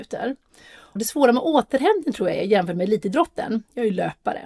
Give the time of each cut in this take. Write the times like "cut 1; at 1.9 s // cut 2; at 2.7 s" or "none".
cut 1; at 1.0 s